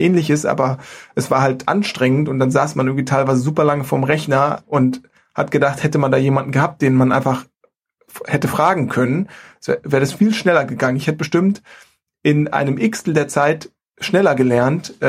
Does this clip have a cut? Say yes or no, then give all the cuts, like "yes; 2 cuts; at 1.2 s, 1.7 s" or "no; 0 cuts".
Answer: no; 0 cuts